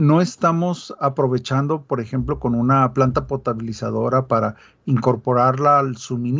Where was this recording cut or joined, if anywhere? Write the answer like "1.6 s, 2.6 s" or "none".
none